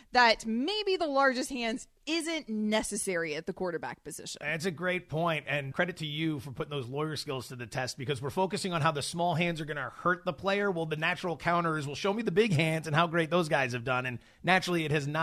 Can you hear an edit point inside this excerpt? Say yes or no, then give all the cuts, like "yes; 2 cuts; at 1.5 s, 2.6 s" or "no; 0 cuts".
yes; 1 cut; at 5.7 s